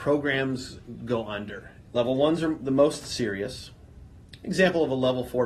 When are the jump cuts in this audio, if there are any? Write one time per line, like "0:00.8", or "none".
0:01.8
0:04.4